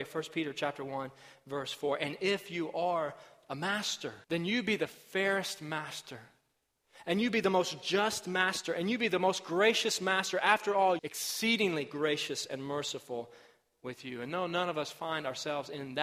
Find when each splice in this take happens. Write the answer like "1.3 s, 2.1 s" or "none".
4.2 s, 11.0 s